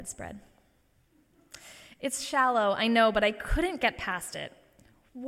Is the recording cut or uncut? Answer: uncut